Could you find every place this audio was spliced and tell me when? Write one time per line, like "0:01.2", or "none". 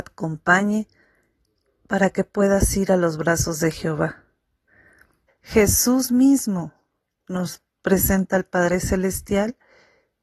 0:05.3